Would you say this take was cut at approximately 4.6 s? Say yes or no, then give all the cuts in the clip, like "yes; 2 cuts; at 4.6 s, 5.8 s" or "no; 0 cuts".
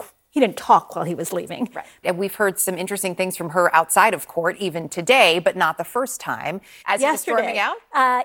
no; 2 cuts; at 2.0 s, 6.8 s